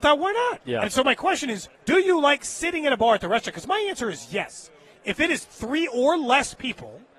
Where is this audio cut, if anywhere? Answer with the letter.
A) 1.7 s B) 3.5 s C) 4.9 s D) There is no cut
A